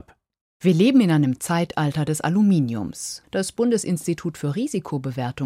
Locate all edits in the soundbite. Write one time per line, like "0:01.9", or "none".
0:03.2